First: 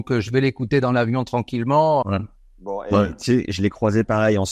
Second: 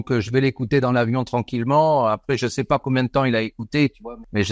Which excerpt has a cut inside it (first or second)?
first